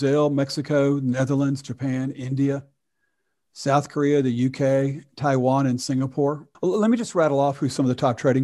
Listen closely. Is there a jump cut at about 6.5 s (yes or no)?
yes